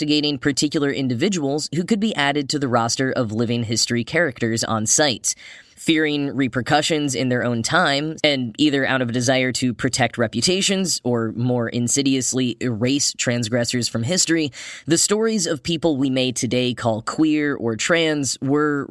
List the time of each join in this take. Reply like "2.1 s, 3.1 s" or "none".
5.7 s, 8.2 s